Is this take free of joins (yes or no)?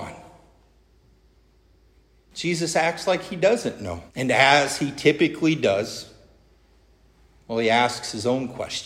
no